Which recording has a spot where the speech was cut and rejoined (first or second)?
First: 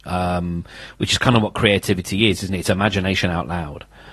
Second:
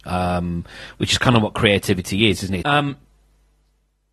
second